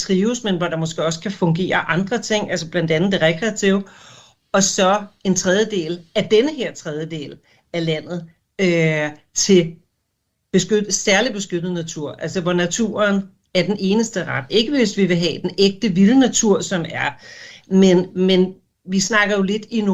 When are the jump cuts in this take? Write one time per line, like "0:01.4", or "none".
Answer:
0:14.5
0:17.6